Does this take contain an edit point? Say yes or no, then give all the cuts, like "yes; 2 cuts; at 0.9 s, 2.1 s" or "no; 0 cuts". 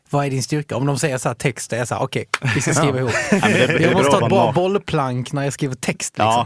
no; 0 cuts